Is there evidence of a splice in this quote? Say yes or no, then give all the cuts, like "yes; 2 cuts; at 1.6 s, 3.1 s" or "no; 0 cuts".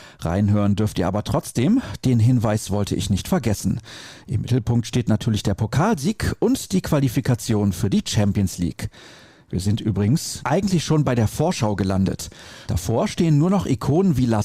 yes; 2 cuts; at 10.4 s, 12.7 s